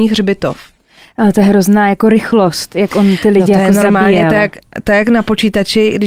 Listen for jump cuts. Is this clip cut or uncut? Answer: uncut